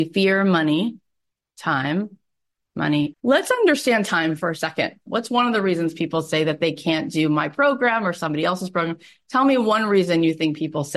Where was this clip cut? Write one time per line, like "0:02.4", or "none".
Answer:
0:03.1
0:05.1